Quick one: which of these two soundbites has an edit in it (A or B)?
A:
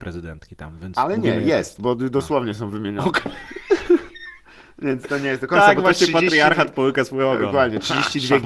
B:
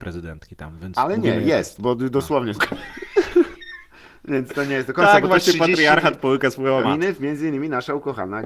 B